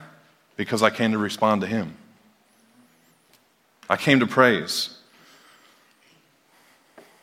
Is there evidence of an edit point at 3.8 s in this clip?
yes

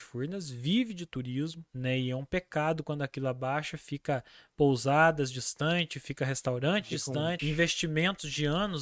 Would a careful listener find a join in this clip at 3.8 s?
no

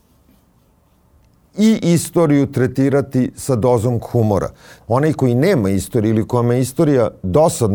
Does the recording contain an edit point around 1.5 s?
no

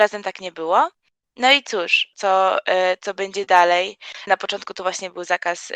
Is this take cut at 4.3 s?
yes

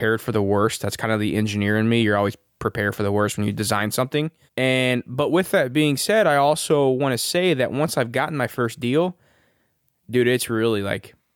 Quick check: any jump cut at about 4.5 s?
yes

